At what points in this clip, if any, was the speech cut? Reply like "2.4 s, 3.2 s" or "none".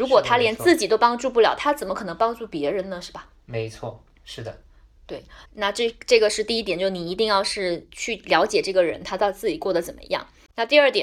5.5 s